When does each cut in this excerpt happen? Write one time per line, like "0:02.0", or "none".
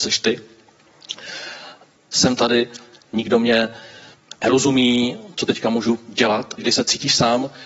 0:02.0
0:06.6